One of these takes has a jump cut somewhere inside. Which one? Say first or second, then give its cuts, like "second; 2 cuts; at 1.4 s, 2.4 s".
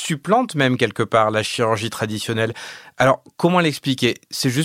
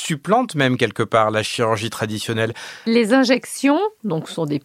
second; 1 cut; at 2.9 s